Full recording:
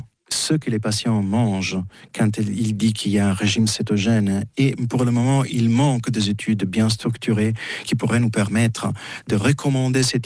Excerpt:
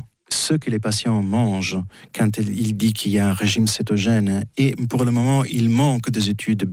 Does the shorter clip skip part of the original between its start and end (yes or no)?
no